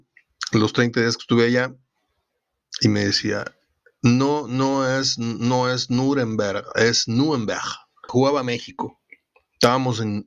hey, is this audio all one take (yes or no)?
no